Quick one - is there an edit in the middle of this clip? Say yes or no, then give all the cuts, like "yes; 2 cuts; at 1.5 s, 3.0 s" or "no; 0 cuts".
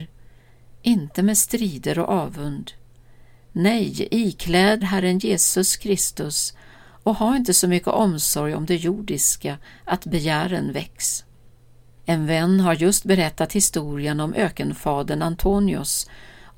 yes; 2 cuts; at 4.8 s, 12.0 s